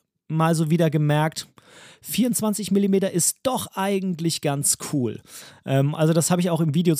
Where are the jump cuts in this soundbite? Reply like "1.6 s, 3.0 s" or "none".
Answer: none

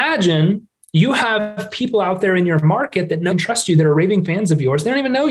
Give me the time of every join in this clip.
3.3 s

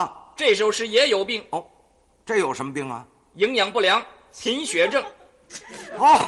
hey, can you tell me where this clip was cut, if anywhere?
none

